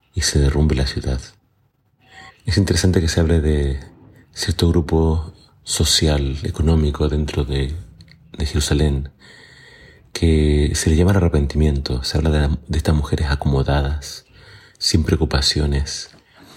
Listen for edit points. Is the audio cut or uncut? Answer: cut